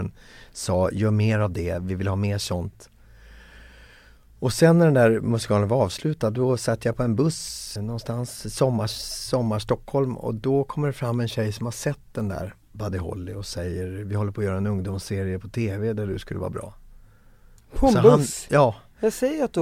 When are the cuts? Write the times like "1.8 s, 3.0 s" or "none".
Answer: 7.8 s, 17.6 s